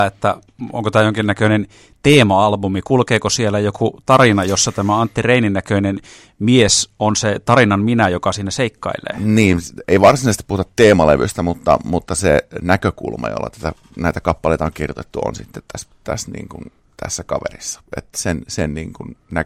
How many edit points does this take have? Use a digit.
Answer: 0